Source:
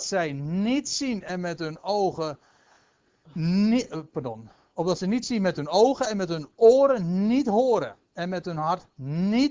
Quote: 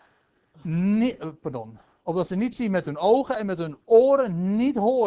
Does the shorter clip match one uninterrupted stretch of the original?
yes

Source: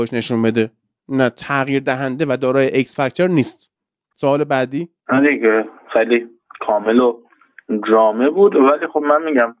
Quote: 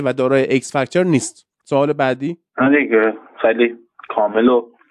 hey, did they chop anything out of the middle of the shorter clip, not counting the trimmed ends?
yes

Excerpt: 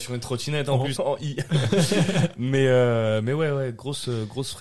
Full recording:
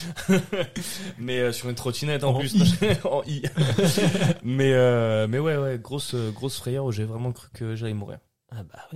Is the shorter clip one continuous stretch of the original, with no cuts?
no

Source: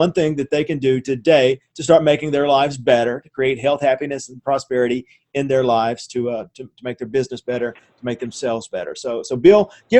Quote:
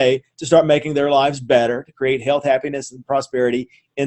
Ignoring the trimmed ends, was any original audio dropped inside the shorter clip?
no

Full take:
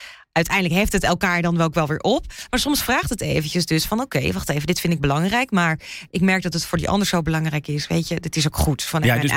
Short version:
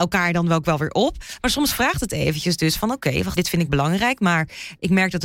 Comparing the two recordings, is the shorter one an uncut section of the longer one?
no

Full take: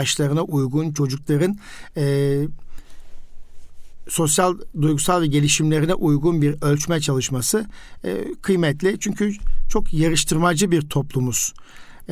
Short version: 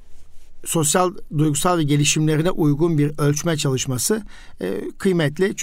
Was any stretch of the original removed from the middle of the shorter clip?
no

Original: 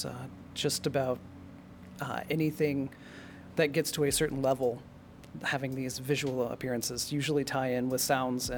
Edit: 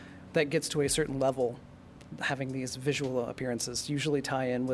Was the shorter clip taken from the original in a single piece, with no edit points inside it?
yes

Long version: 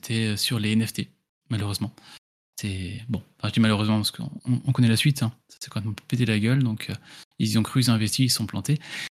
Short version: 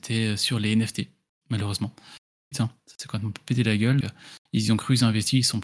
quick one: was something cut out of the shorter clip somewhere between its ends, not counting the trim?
yes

